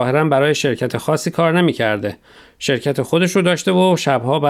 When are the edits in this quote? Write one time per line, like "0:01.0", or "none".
none